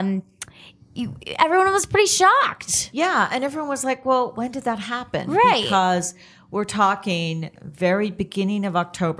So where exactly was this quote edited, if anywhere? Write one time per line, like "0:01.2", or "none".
none